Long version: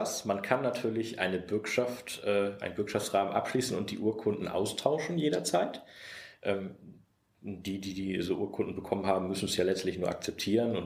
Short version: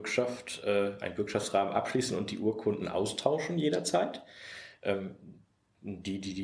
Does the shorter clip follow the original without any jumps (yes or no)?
yes